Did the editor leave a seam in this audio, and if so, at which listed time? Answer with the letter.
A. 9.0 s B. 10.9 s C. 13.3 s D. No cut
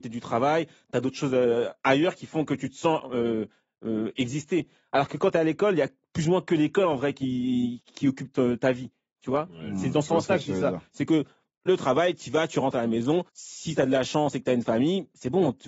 C